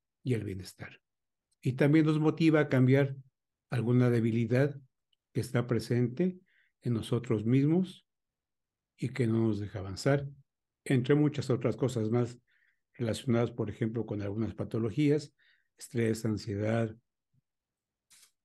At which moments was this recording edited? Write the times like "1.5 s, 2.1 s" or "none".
none